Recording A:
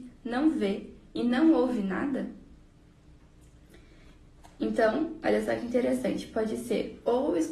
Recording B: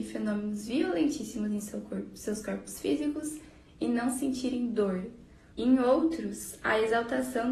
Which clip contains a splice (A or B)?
B